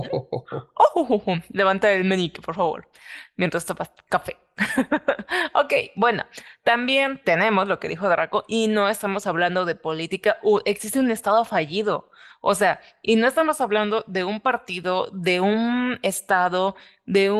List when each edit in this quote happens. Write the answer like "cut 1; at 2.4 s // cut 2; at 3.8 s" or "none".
none